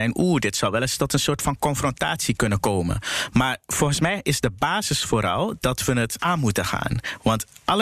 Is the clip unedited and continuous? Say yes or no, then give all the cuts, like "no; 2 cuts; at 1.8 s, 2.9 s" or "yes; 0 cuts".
yes; 0 cuts